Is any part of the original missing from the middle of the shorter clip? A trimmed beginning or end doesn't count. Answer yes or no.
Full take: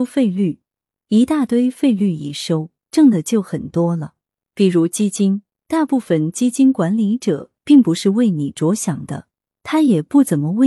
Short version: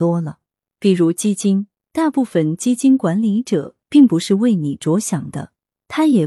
no